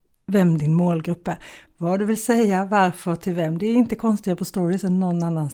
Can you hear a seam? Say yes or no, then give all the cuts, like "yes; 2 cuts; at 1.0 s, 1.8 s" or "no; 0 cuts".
yes; 1 cut; at 1.7 s